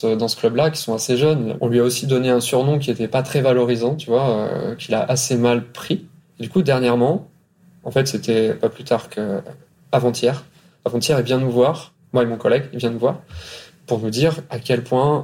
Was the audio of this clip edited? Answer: yes; 1 cut; at 1.6 s

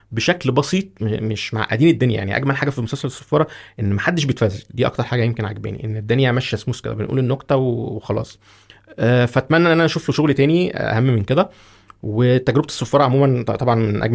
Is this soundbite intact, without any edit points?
no; 1 cut; at 1.0 s

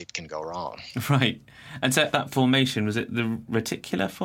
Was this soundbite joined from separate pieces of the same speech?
yes; 1 cut; at 2.1 s

